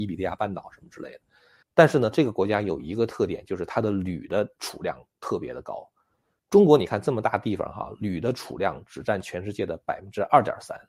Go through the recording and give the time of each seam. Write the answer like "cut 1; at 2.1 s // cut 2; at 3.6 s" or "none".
cut 1; at 1.6 s